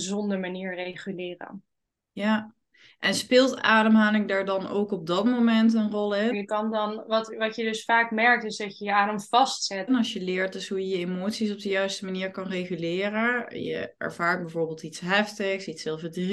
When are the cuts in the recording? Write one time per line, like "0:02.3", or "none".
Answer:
0:06.3
0:09.9

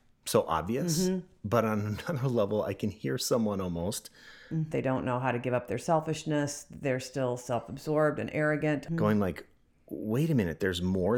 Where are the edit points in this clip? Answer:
0:04.7
0:08.9

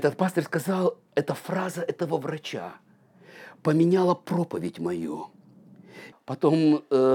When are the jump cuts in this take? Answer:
0:06.1

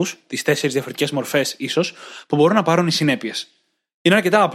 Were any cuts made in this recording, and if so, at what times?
none

